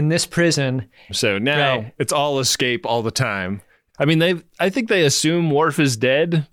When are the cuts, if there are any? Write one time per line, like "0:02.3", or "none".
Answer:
0:01.1
0:03.9